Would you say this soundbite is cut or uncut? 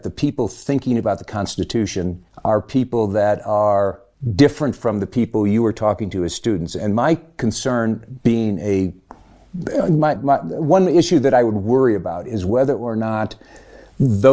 cut